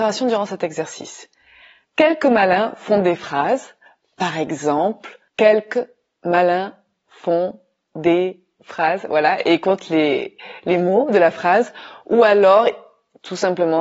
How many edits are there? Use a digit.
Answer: 0